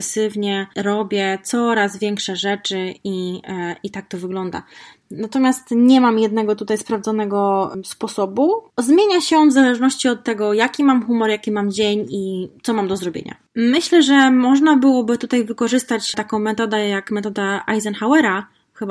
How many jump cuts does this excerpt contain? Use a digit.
0